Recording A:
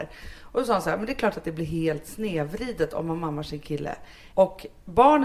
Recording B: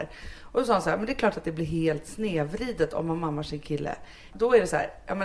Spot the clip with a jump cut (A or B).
A